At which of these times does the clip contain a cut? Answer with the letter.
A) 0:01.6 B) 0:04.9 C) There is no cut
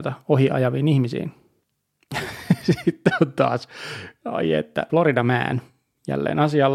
B